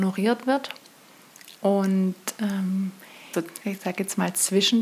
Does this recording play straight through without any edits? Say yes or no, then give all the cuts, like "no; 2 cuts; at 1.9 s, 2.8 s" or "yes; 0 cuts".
no; 2 cuts; at 1.6 s, 3.3 s